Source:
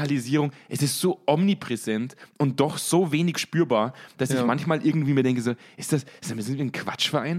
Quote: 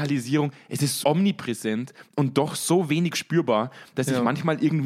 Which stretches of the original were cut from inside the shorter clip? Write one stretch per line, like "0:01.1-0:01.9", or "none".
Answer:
0:01.0-0:01.2